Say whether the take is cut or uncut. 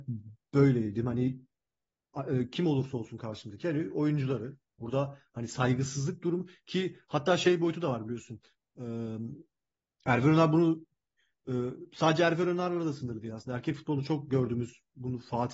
uncut